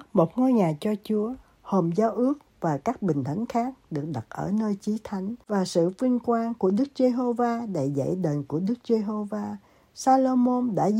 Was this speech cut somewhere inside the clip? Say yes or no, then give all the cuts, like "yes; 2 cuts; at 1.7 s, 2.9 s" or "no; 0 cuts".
no; 0 cuts